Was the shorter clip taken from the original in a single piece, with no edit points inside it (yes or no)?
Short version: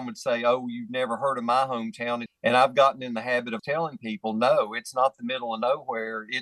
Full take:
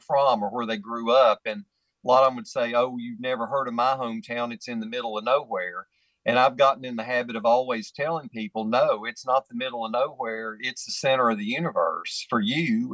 no